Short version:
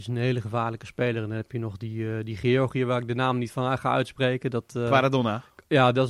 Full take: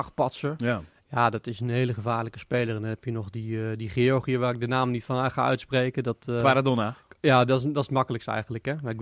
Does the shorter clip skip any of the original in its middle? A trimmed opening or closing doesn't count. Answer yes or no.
no